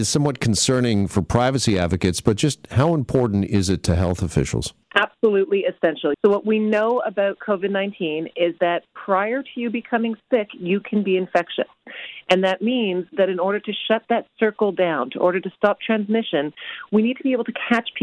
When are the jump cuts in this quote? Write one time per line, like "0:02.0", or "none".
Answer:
0:04.8
0:06.1